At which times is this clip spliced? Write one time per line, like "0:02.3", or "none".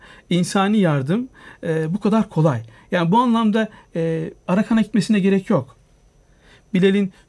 0:04.5